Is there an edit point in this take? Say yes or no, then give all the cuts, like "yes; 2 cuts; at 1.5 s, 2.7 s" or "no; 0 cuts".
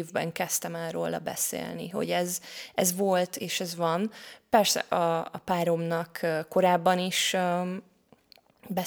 no; 0 cuts